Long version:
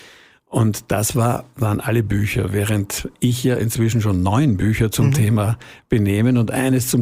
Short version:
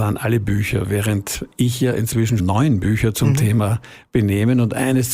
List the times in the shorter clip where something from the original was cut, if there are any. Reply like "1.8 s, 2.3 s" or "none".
2.4 s